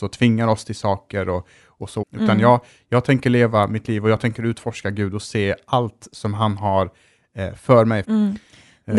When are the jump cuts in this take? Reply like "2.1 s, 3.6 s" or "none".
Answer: 2.0 s, 8.0 s